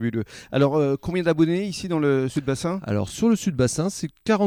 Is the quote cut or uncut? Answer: uncut